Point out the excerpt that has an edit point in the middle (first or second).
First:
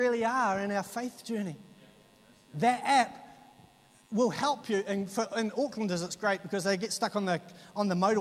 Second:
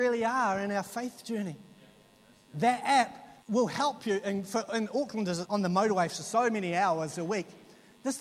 second